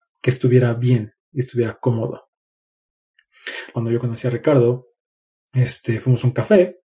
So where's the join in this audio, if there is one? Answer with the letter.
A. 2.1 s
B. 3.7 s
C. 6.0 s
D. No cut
B